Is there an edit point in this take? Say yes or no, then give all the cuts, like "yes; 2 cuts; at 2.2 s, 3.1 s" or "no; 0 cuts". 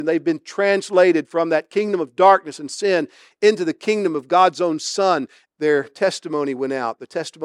yes; 1 cut; at 5.4 s